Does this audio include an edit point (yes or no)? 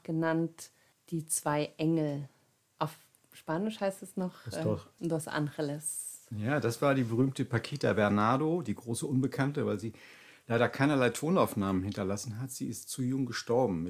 yes